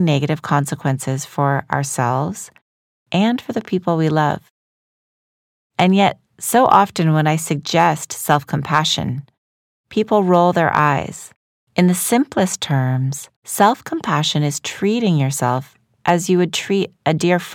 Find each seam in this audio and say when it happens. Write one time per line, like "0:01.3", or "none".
0:11.6
0:13.4